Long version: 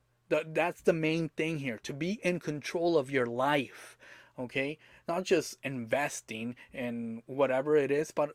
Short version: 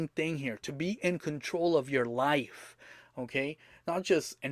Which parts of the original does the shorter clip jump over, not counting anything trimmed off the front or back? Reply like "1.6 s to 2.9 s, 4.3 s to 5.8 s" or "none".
none